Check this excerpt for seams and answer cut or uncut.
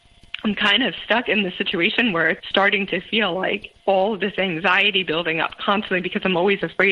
cut